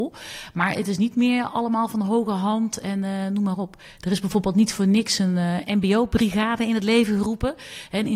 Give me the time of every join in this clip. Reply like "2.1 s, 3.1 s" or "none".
none